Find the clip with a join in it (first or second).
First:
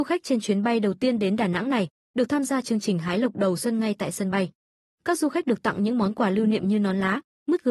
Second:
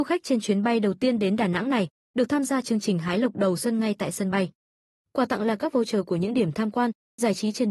first